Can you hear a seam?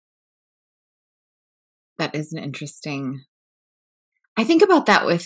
no; 0 cuts

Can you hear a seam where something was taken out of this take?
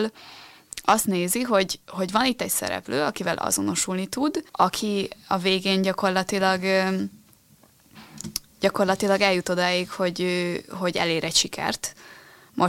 yes; 1 cut; at 4.5 s

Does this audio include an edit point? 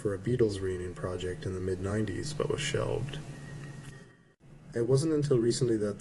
no; 0 cuts

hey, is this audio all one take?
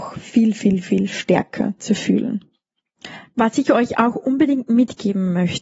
no; 1 cut; at 3.3 s

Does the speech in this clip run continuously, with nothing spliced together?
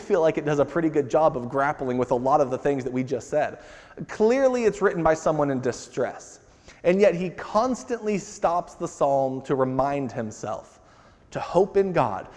yes; 0 cuts

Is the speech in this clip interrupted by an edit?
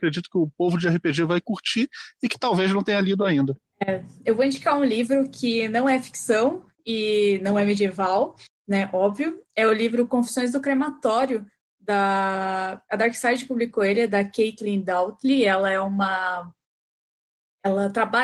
no; 0 cuts

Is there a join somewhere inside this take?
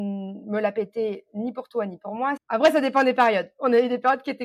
yes; 1 cut; at 2.4 s

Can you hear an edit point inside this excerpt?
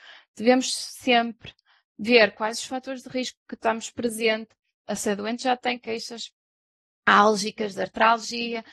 no; 0 cuts

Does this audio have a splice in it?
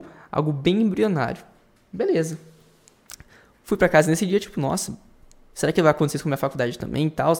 no; 0 cuts

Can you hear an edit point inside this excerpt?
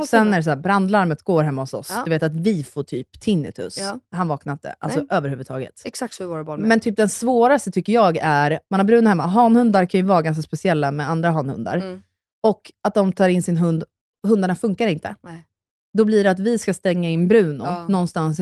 yes; 1 cut; at 8.6 s

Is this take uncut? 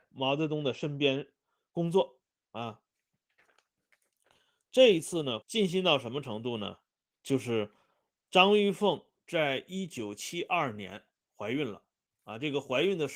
no; 1 cut; at 5.4 s

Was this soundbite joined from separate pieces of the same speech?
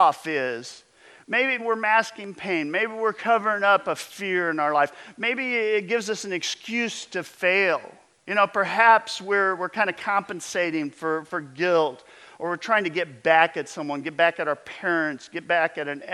yes; 1 cut; at 1.6 s

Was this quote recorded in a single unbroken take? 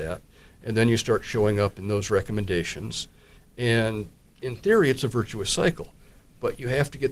yes; 0 cuts

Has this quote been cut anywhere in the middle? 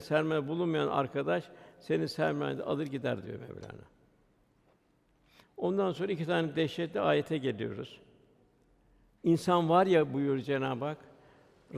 no; 0 cuts

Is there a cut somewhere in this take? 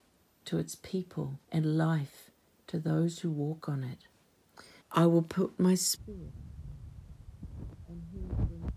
yes; 2 cuts; at 1.4 s, 4.8 s

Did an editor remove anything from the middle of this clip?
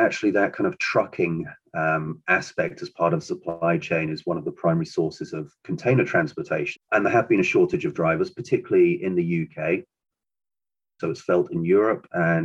yes; 2 cuts; at 6.7 s, 11.0 s

